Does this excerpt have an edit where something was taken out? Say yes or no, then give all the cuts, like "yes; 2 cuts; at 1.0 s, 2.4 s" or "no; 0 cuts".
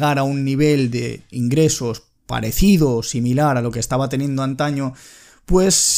no; 0 cuts